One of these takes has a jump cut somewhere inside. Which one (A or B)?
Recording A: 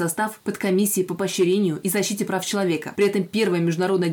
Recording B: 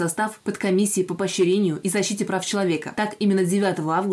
A